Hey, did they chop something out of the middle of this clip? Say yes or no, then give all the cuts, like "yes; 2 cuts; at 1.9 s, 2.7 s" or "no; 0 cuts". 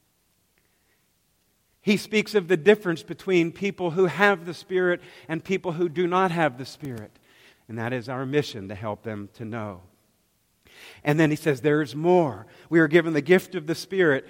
yes; 1 cut; at 7.5 s